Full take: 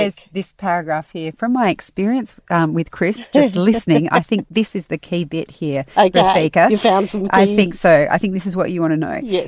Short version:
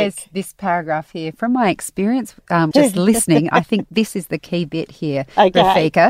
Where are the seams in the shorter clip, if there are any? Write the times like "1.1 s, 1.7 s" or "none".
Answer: 2.7 s